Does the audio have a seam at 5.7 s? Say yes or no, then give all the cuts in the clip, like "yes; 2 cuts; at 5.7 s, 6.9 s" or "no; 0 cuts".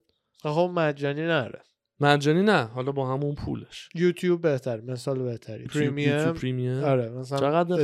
yes; 1 cut; at 5.7 s